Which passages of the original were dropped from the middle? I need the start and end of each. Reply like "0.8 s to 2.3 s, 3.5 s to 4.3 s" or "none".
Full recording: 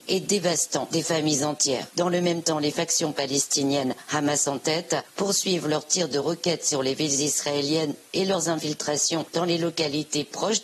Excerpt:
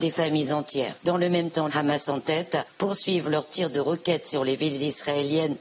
2.6 s to 4.1 s